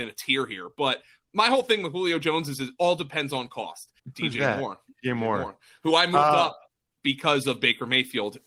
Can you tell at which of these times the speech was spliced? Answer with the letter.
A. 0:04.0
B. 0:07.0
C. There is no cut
A